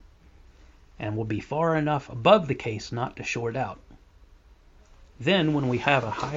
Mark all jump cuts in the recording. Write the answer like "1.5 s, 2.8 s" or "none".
none